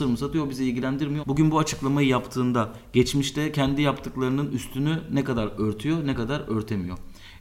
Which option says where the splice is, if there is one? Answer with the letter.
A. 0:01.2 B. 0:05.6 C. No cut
A